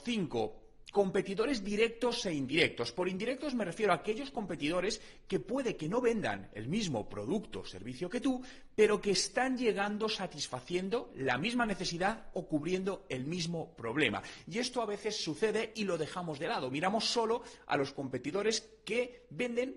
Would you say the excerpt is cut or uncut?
uncut